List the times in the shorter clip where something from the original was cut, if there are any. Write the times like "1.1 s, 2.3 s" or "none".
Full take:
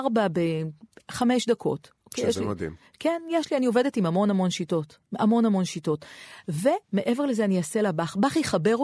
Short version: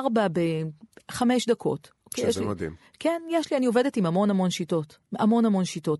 none